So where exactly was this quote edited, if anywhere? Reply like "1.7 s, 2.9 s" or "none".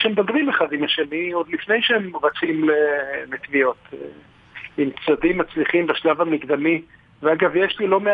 none